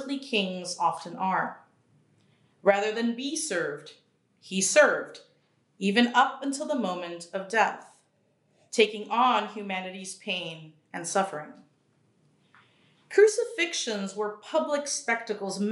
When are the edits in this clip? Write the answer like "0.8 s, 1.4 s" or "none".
none